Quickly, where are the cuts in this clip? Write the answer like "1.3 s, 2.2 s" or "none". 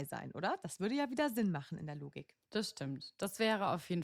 2.4 s